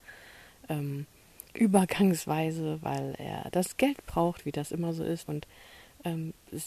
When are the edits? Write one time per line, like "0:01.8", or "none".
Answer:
0:05.2